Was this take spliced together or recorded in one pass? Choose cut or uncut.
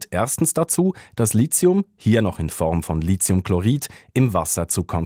uncut